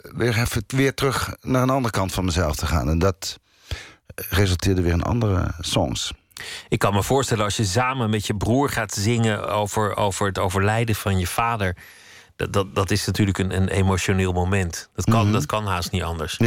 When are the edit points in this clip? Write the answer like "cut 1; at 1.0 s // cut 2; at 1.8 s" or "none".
none

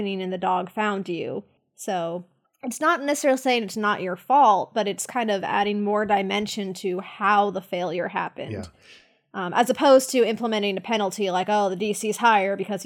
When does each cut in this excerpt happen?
none

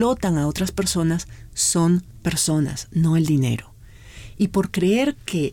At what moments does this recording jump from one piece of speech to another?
none

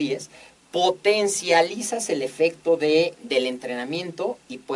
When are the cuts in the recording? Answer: cut 1; at 3.1 s

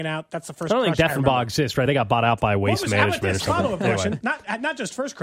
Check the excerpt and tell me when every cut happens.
none

